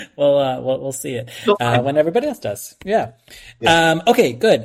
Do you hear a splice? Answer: no; 0 cuts

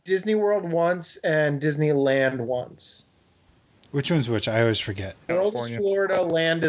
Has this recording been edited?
yes; 1 cut; at 5.3 s

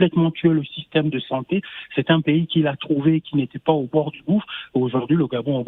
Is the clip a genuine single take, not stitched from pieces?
yes; 0 cuts

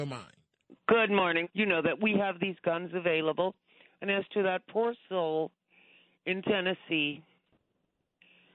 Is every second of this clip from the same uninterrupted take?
no; 1 cut; at 1.4 s

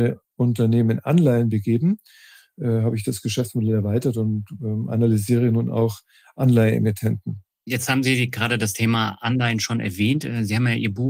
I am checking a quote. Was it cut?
no; 0 cuts

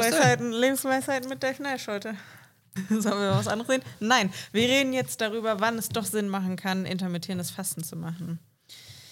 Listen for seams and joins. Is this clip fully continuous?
no; 1 cut; at 2.8 s

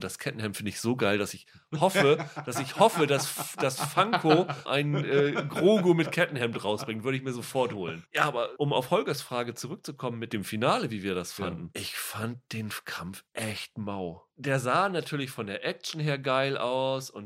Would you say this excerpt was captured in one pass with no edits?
yes; 0 cuts

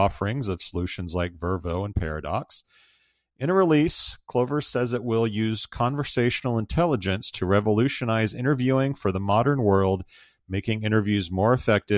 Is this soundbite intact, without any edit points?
yes; 0 cuts

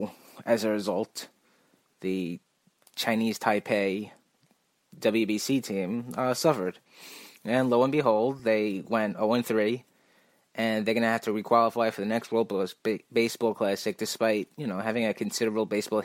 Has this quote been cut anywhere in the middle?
no; 0 cuts

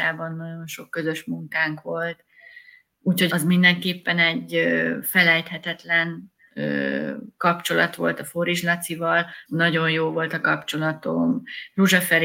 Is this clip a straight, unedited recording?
no; 2 cuts; at 3.3 s, 9.5 s

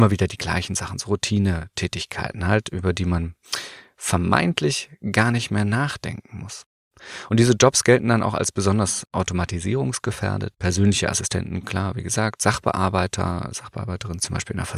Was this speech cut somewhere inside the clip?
no; 0 cuts

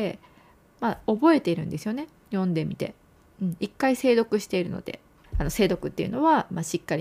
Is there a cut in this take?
yes; 1 cut; at 5.2 s

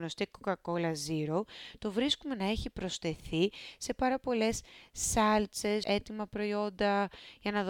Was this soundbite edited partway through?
yes; 1 cut; at 5.8 s

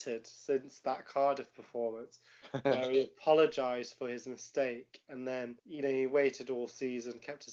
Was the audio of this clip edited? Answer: yes; 1 cut; at 5.6 s

